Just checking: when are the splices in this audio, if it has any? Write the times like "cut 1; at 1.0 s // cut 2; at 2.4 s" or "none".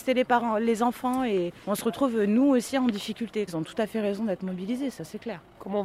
cut 1; at 3.5 s